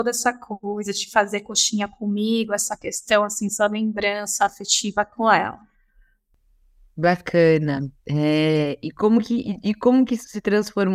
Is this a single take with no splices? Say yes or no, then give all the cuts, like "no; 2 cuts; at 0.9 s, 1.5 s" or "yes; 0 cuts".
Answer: yes; 0 cuts